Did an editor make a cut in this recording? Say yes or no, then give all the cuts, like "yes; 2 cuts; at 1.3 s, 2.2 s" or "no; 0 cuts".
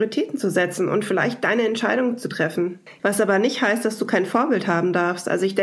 yes; 1 cut; at 3.0 s